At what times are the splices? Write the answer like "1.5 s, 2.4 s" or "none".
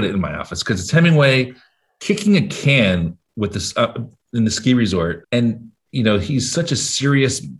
5.2 s